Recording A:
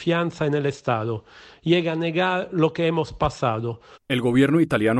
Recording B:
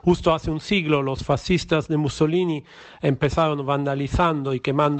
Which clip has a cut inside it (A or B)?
A